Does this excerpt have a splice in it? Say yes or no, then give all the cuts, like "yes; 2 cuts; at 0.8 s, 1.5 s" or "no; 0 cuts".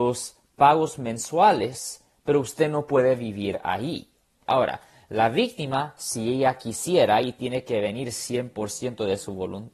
yes; 1 cut; at 4.5 s